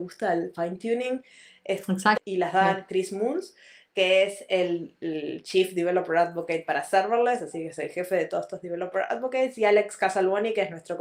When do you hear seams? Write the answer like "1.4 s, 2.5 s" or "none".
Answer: 2.2 s

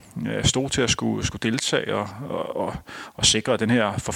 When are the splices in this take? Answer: 2.5 s

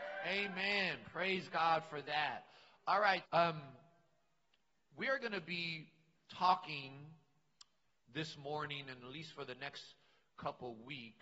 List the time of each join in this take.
3.2 s

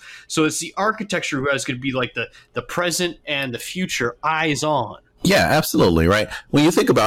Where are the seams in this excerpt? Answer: none

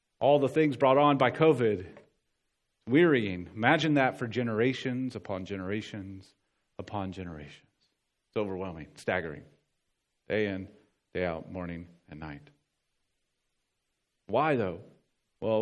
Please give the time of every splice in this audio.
none

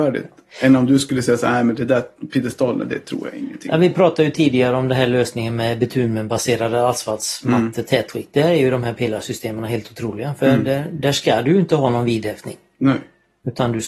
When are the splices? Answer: none

